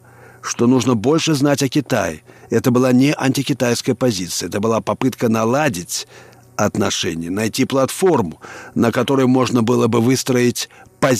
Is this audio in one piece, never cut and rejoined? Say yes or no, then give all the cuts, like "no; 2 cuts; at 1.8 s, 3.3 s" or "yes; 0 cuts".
yes; 0 cuts